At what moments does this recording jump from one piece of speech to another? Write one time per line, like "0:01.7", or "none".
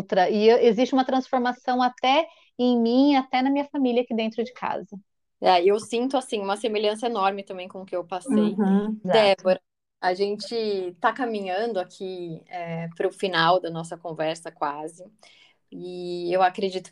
0:09.0